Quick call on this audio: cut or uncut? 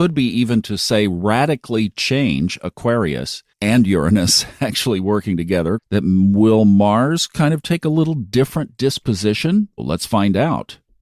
cut